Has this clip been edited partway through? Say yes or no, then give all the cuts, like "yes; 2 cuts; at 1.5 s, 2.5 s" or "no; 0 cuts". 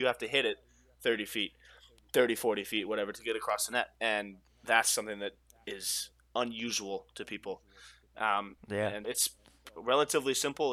yes; 1 cut; at 9.0 s